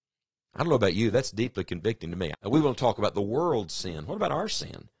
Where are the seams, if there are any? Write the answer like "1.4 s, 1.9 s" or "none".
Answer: 2.3 s